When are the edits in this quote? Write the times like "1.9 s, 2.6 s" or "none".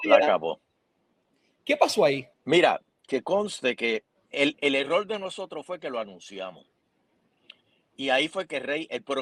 2.3 s, 4.1 s